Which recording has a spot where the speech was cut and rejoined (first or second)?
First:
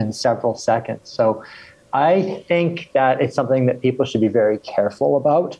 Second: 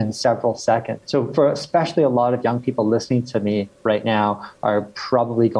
second